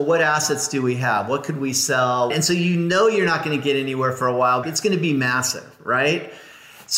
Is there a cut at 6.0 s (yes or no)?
no